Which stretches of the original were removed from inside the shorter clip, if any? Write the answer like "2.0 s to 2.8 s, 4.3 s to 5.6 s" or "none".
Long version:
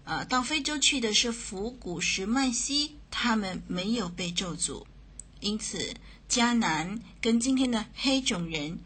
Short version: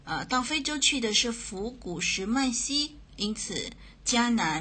3.1 s to 5.3 s